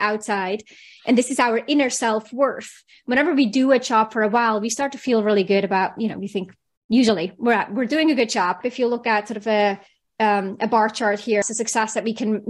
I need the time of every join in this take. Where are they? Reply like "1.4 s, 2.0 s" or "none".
8.6 s, 11.4 s